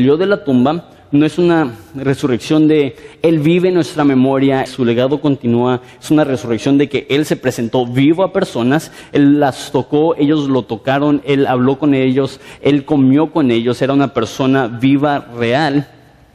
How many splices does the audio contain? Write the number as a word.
one